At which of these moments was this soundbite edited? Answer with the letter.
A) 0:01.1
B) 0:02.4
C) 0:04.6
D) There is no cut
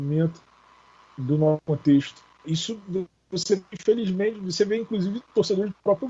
B